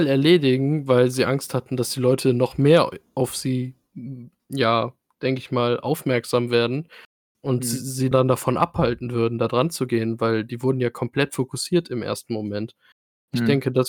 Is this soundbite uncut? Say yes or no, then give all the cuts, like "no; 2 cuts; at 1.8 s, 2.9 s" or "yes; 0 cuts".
no; 1 cut; at 8.1 s